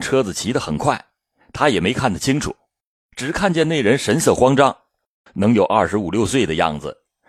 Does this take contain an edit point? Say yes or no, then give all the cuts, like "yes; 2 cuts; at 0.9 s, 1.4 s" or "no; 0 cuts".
no; 0 cuts